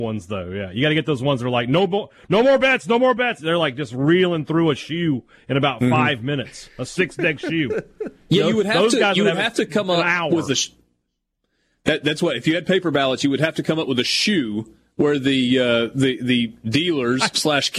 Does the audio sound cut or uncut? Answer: uncut